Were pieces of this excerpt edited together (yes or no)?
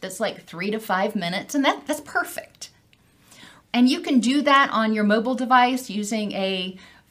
yes